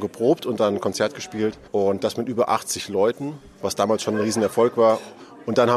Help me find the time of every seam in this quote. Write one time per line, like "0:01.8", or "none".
0:01.7